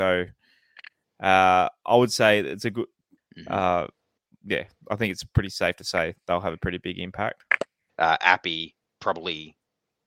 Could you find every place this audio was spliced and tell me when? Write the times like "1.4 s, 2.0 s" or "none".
3.2 s, 7.9 s